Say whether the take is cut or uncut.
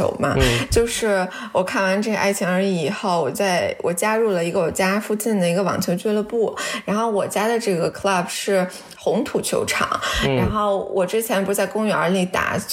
uncut